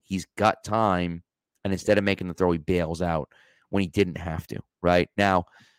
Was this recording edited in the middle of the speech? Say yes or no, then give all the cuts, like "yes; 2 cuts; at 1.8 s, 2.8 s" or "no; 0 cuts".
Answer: no; 0 cuts